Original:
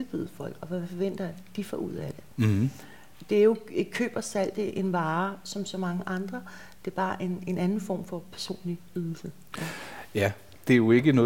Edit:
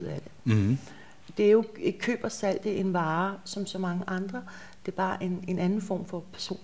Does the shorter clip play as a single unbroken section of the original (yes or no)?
no